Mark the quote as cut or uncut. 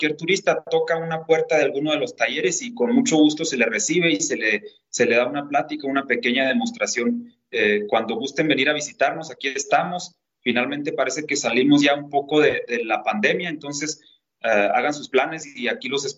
uncut